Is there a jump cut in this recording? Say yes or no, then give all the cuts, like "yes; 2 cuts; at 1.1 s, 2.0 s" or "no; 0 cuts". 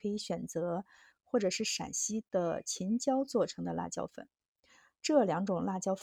yes; 1 cut; at 1.1 s